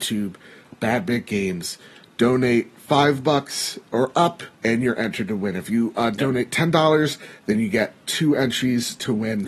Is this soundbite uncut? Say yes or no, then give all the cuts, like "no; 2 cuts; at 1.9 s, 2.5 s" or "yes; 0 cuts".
no; 1 cut; at 4.5 s